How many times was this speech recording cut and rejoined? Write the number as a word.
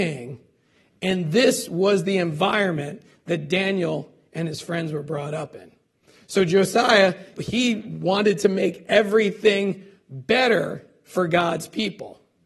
one